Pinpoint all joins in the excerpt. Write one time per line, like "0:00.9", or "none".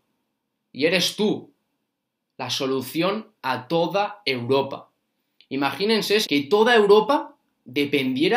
0:06.2